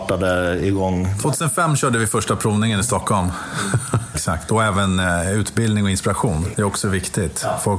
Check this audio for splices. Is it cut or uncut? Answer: cut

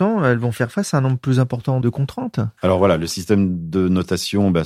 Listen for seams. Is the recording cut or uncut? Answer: cut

